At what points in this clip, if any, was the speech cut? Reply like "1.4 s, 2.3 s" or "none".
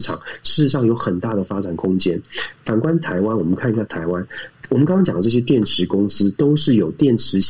none